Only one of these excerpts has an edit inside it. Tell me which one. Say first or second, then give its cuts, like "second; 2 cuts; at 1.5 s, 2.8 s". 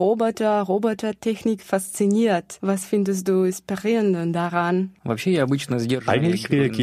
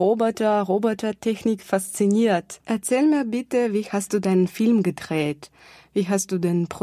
second; 1 cut; at 2.6 s